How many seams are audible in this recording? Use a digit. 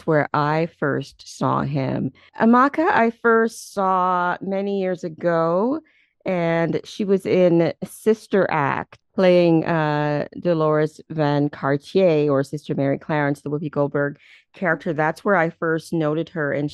0